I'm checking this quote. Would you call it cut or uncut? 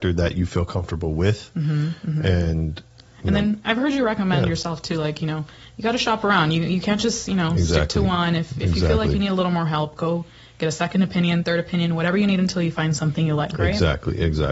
uncut